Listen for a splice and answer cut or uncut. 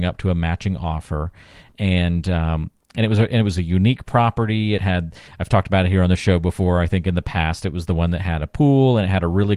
uncut